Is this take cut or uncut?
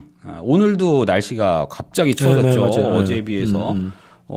uncut